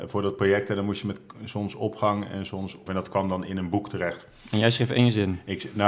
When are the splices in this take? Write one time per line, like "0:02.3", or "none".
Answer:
0:02.9